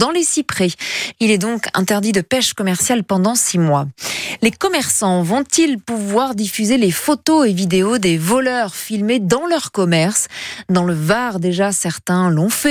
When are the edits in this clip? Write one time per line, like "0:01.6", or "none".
0:01.1